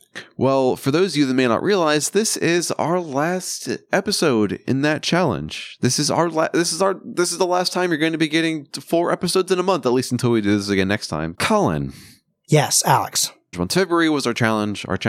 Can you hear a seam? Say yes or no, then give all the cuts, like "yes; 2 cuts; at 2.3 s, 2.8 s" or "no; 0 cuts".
yes; 2 cuts; at 11.3 s, 13.5 s